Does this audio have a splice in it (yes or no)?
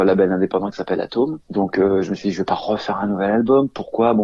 yes